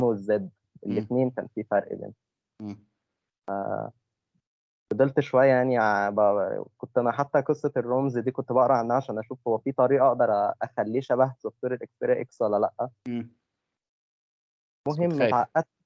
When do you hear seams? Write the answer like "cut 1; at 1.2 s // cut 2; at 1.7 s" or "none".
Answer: none